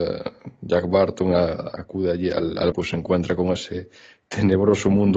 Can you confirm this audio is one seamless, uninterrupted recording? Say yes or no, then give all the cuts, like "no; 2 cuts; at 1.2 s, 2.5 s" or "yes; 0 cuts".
no; 1 cut; at 2.7 s